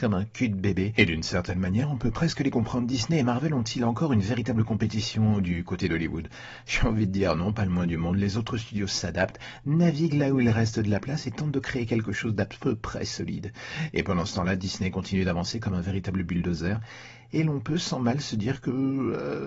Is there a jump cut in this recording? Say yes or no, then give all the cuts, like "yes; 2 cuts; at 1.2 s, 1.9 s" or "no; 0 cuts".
no; 0 cuts